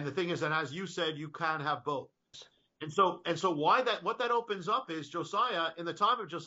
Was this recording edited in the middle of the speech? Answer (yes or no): yes